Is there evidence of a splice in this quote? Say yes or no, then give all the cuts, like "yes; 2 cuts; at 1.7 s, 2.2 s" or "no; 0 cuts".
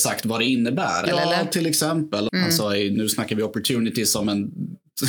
yes; 2 cuts; at 1.1 s, 2.3 s